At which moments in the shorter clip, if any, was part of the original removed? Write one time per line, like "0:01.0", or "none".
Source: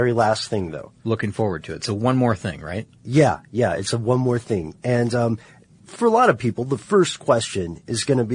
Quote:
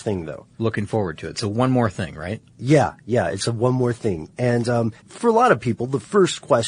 0:05.0